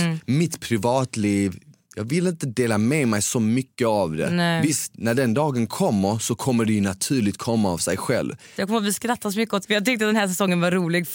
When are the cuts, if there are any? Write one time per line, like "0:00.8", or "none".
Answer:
0:08.6
0:09.6